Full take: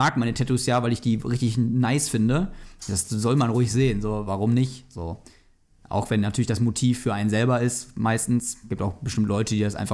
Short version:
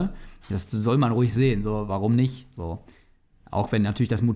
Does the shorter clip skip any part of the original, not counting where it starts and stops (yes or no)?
no